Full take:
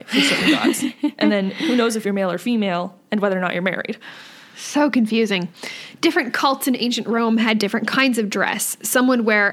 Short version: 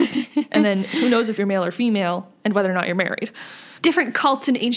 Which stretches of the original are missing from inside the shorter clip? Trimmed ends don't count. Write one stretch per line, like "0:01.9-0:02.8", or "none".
0:04.4-0:06.0